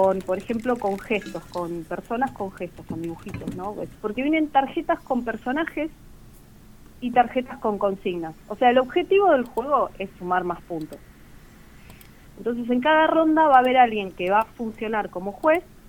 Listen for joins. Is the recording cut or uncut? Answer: cut